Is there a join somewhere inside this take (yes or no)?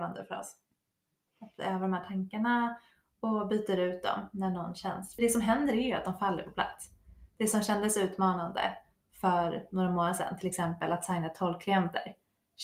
yes